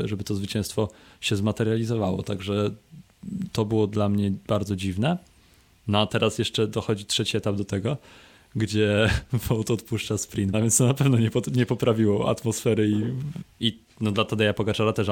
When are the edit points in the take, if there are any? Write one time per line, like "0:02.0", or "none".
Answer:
0:10.5
0:13.4